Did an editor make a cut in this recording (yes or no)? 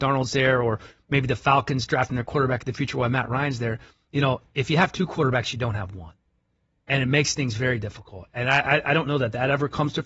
no